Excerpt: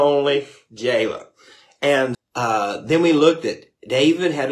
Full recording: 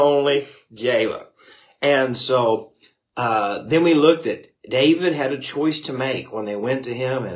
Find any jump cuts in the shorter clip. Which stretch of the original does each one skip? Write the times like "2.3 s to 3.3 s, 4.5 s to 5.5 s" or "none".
2.1 s to 3.0 s